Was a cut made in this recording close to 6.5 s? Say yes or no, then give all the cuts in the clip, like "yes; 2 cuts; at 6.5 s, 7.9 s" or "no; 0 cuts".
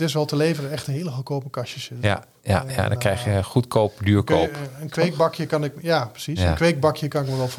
no; 0 cuts